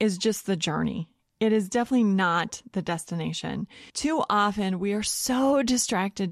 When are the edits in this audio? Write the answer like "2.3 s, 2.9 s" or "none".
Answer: 3.9 s